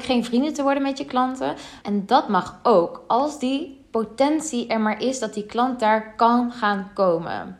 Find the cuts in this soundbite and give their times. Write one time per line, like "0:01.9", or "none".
0:01.8